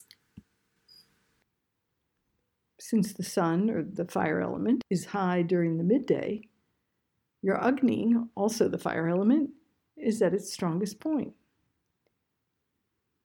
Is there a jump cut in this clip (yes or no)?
yes